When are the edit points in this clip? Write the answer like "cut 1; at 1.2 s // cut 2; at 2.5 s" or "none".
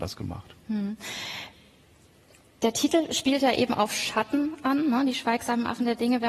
none